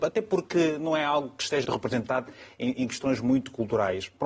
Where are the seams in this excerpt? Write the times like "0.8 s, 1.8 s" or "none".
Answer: 1.6 s, 2.7 s